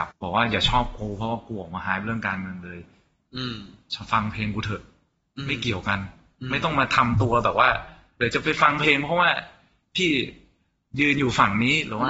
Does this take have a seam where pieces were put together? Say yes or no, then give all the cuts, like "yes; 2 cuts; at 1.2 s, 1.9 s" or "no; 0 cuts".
no; 0 cuts